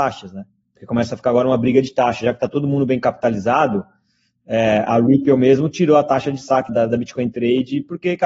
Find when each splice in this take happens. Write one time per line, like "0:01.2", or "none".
0:06.7

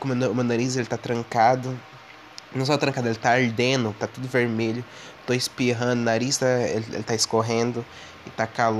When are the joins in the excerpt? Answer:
0:04.0

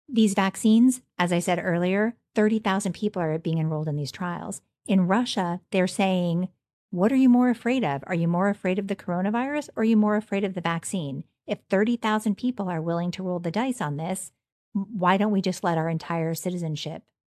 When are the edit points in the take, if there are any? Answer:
none

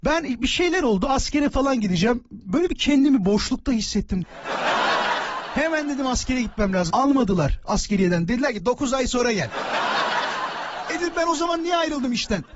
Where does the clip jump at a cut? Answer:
0:04.2
0:06.9

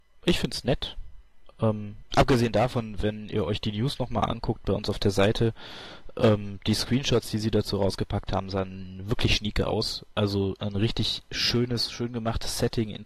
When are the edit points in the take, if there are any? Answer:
none

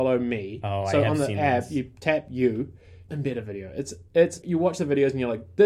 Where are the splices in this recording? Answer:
0:03.1
0:04.4

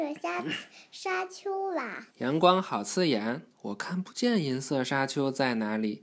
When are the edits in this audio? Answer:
0:02.1

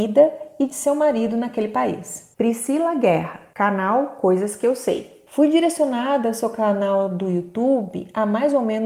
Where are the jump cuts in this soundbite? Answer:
0:02.4

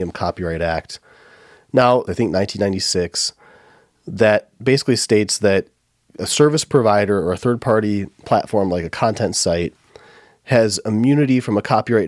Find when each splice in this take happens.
0:02.1

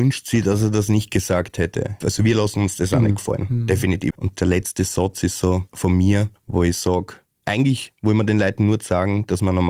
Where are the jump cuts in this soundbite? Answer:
0:02.0
0:04.1

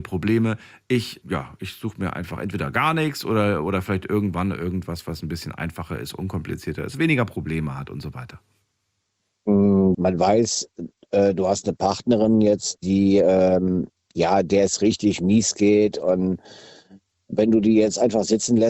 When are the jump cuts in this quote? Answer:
0:01.2
0:09.9

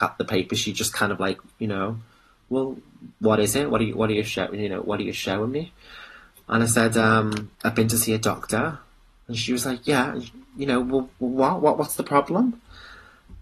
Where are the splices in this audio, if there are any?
0:07.6

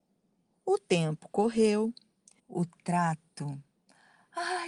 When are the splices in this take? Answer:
0:02.4

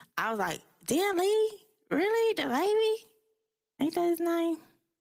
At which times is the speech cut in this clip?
none

